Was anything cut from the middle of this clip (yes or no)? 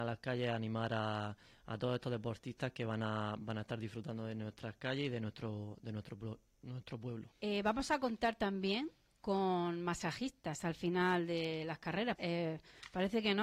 yes